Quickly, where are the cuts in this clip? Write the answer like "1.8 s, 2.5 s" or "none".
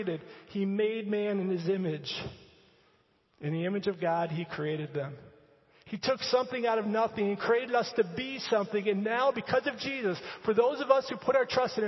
none

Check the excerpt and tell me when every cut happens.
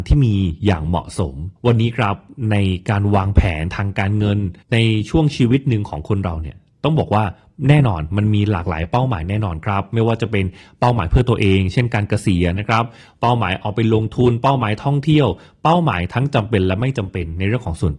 1.6 s, 4.6 s

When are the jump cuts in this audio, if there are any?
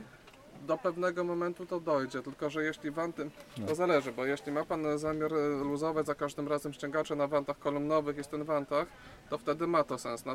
none

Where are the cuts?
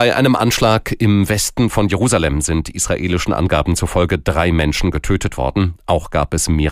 none

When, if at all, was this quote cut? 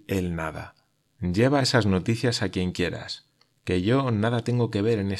1.1 s

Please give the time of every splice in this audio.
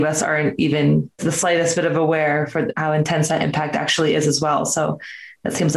none

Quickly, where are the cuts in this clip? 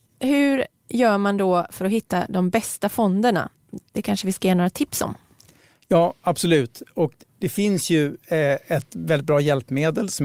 none

